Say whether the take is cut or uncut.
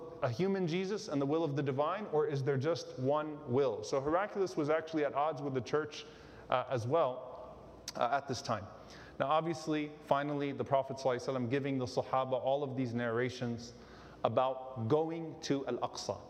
uncut